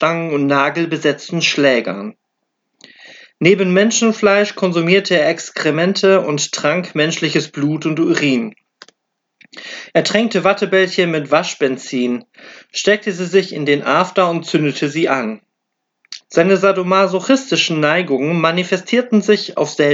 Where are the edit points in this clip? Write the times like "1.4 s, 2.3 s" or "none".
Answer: 16.2 s